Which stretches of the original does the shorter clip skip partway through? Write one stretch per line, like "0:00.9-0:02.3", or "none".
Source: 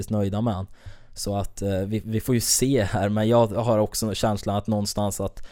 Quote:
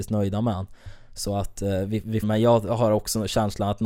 0:02.2-0:03.1